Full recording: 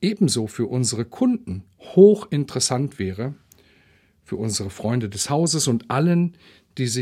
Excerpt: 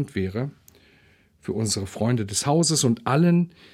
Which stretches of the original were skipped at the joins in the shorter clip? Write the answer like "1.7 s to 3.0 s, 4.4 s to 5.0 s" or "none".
none